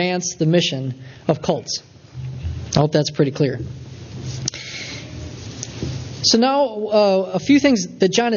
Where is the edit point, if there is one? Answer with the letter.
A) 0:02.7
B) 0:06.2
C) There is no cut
C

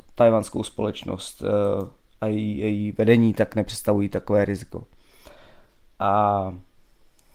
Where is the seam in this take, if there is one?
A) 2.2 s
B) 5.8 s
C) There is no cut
C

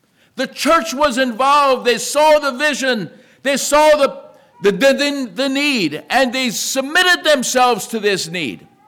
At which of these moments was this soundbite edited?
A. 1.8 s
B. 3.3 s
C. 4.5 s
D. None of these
C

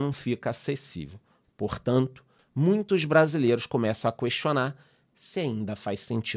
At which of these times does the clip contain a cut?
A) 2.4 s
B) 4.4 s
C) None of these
A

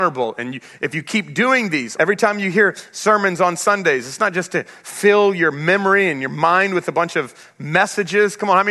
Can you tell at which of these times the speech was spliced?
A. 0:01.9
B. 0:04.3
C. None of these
A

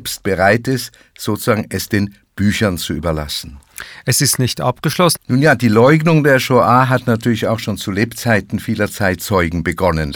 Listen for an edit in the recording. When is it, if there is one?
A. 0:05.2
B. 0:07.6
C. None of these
A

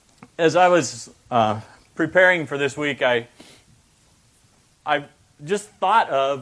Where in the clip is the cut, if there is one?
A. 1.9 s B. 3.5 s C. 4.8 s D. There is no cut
D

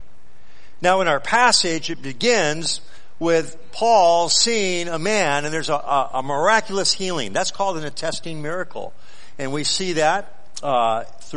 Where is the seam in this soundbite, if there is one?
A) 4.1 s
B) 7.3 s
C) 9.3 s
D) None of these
D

